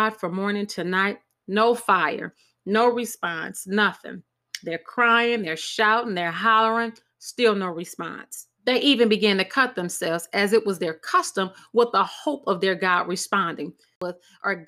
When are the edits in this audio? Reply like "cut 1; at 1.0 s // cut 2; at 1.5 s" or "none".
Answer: cut 1; at 8.5 s